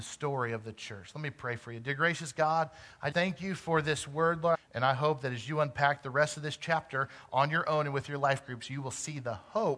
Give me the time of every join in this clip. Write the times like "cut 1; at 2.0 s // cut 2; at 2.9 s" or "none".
cut 1; at 3.1 s // cut 2; at 4.5 s